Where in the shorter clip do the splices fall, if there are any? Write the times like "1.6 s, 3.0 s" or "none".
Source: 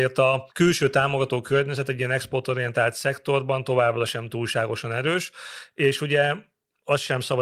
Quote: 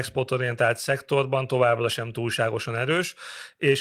none

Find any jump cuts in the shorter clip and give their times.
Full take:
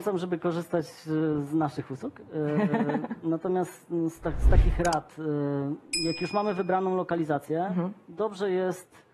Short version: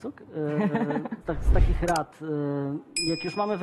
1.2 s

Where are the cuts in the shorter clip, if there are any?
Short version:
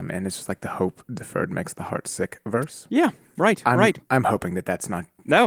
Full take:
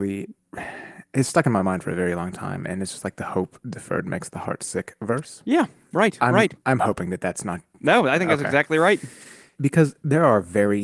none

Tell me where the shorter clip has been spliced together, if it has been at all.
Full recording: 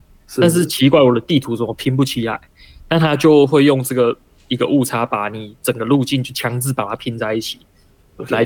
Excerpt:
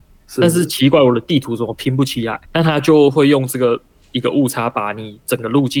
2.4 s

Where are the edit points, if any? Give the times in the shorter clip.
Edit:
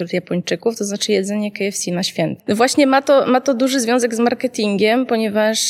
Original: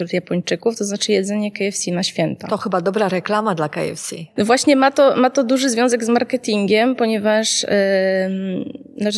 2.4 s

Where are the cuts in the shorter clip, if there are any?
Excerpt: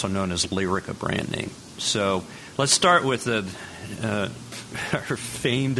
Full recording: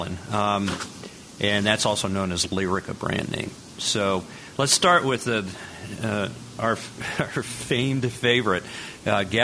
4.5 s

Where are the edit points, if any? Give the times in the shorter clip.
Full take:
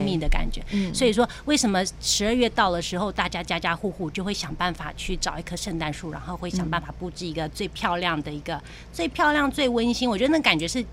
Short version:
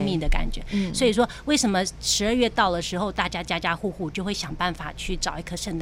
none

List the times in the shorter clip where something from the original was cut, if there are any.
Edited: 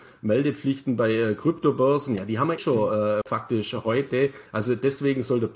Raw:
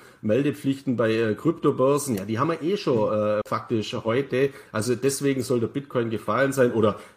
2.6 s

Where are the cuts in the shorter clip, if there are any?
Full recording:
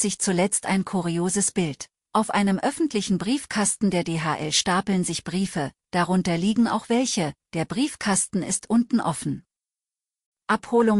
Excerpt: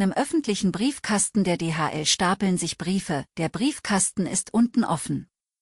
3.3 s

